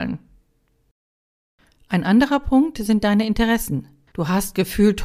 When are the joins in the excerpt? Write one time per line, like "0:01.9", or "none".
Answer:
0:04.1